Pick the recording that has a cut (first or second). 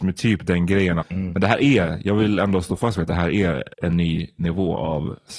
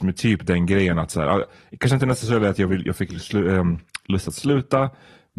first